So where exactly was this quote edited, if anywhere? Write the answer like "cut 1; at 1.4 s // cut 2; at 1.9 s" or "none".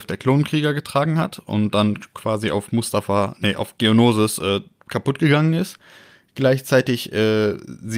none